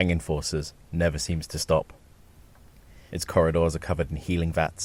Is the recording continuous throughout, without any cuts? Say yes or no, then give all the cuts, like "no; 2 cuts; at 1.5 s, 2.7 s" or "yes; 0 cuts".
no; 1 cut; at 3.1 s